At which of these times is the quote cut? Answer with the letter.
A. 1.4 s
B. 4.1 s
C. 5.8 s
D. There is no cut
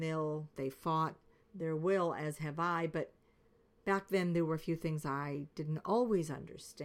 A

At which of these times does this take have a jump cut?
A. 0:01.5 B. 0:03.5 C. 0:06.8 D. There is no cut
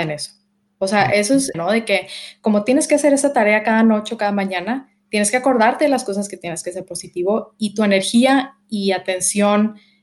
A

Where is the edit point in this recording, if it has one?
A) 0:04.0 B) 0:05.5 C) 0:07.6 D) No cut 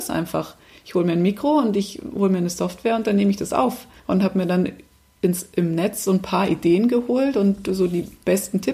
A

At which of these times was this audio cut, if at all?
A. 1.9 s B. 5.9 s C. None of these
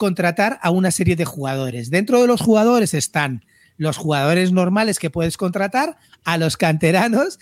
C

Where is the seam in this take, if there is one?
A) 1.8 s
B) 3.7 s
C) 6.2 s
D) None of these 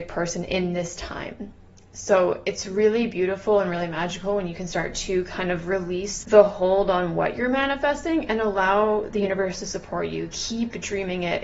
C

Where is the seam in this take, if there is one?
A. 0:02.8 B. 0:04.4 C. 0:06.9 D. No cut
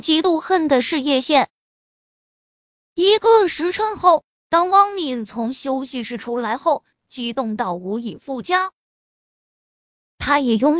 C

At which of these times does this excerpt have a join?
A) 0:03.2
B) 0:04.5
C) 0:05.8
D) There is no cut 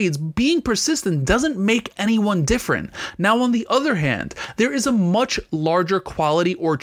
D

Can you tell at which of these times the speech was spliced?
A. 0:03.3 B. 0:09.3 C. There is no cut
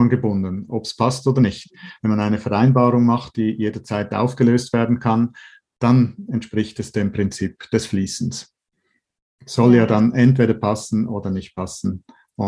C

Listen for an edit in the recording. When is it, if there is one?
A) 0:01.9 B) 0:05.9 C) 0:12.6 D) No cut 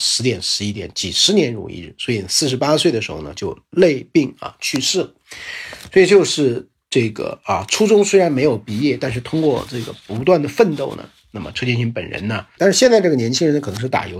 C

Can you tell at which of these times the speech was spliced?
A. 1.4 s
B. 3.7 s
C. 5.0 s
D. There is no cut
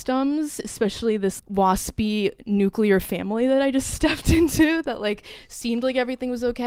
A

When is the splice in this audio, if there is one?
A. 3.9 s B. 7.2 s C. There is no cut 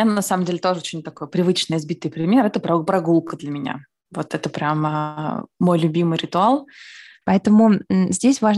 B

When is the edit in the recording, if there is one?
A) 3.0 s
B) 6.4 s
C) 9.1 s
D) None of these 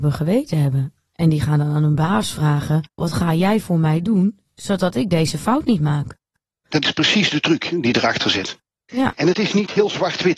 A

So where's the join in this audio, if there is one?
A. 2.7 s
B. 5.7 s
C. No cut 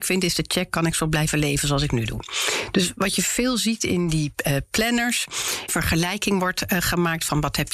B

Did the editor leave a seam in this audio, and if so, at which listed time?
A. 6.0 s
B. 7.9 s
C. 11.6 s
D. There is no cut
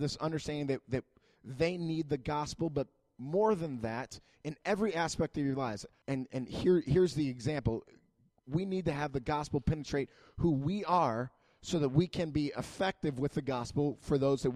A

